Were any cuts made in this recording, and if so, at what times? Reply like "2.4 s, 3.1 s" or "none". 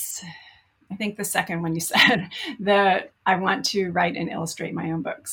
none